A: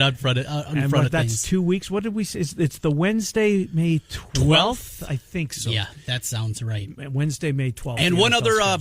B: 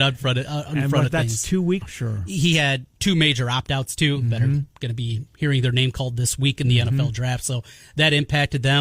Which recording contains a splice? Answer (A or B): B